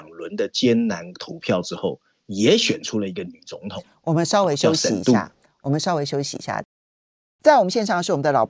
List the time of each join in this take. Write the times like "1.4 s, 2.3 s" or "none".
7.4 s